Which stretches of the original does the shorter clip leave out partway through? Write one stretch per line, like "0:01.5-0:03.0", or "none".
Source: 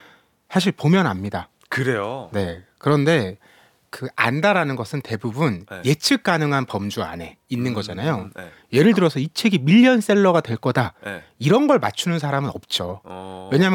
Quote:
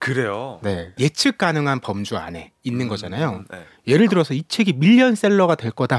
0:02.7-0:05.8